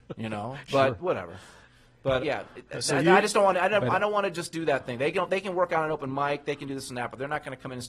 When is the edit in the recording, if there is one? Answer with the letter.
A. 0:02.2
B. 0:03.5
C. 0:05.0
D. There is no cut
A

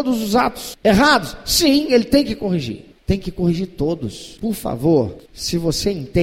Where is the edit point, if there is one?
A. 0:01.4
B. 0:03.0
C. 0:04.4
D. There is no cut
C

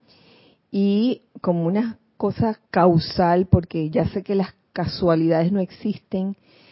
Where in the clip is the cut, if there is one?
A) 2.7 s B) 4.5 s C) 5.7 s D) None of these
A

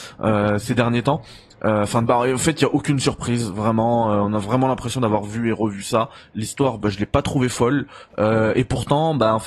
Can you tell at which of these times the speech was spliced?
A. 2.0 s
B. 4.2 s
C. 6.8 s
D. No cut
A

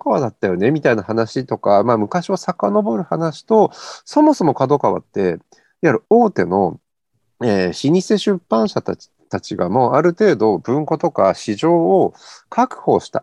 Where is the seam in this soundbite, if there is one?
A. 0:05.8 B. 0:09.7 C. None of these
C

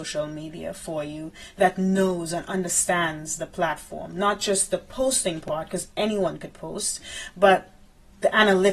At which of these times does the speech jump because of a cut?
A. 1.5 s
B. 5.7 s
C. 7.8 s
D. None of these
D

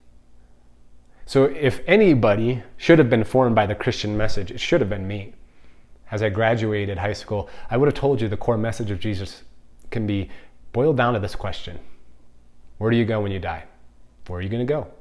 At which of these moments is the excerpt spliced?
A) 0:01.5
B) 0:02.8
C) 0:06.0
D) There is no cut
D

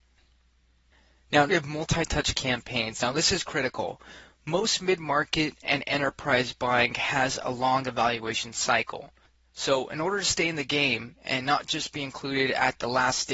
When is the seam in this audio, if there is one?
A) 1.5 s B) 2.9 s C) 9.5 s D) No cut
A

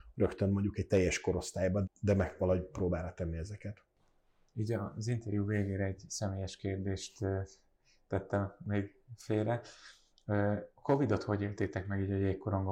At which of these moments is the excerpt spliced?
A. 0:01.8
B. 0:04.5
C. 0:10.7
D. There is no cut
A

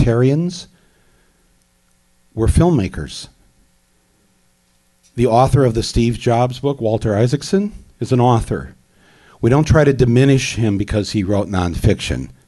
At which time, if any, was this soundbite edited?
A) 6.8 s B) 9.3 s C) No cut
C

